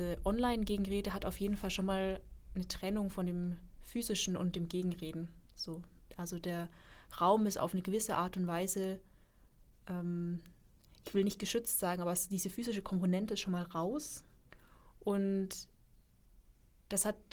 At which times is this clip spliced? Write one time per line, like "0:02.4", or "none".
none